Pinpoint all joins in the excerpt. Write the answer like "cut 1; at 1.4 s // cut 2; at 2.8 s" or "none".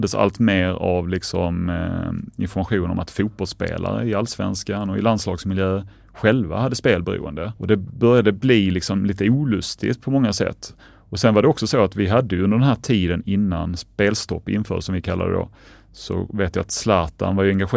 none